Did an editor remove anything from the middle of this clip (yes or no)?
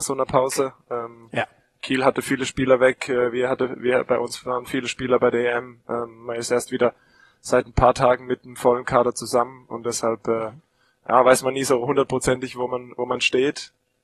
no